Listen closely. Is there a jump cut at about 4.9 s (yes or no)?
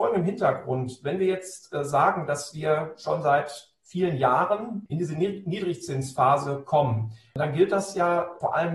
yes